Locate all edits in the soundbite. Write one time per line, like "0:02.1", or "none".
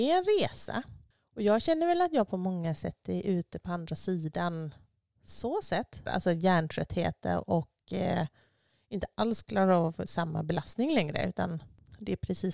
0:06.1

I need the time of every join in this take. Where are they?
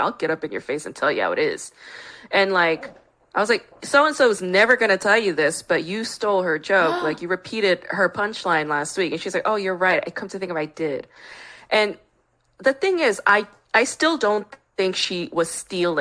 none

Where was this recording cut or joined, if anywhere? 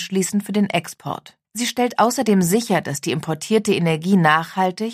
0:01.4

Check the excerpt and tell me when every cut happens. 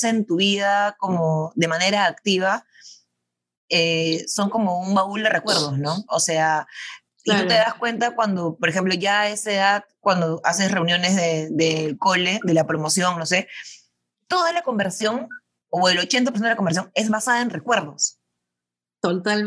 none

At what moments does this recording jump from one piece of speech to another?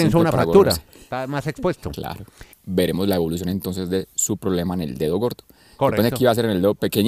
0:02.5

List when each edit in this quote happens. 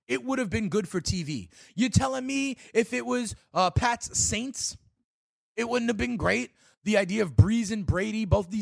0:01.7

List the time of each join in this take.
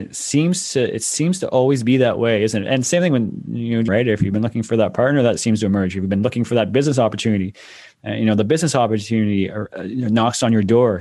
0:03.9

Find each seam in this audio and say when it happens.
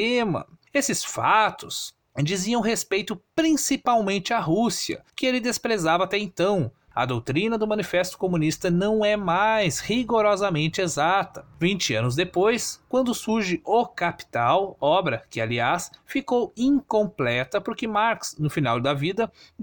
0:06.9

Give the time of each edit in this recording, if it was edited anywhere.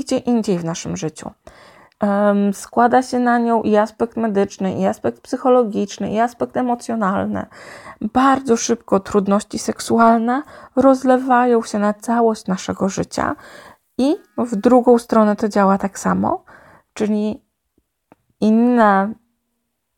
0:01.9

